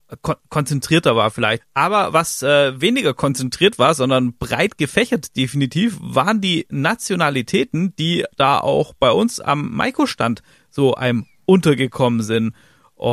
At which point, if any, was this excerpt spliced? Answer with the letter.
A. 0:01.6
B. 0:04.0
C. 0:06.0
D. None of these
A